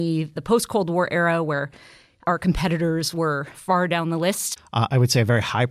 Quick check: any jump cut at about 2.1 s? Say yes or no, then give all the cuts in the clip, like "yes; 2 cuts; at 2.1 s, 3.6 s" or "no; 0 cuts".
no; 1 cut; at 4.6 s